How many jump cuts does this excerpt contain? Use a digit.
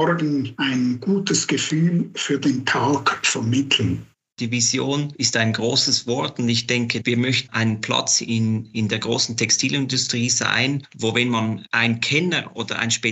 2